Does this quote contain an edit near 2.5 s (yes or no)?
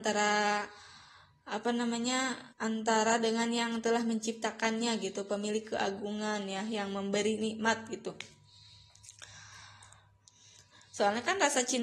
yes